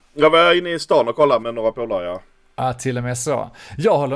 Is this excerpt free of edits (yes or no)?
no